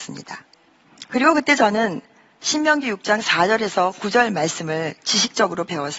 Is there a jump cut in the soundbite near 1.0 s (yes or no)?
yes